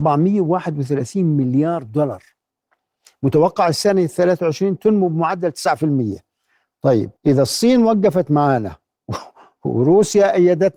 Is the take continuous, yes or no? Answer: no